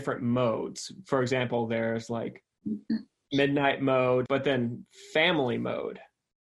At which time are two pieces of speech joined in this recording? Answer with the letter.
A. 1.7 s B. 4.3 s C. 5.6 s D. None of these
B